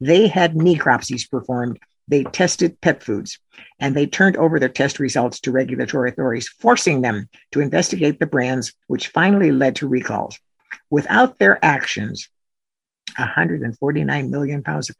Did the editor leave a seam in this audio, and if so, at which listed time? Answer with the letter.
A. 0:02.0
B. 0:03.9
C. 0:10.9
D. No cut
B